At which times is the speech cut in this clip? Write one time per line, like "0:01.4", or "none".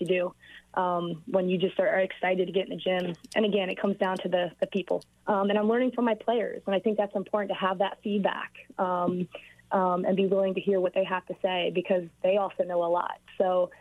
0:05.2